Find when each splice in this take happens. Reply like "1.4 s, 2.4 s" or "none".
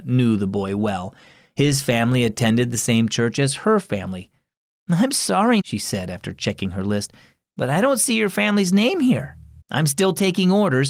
5.6 s, 9.6 s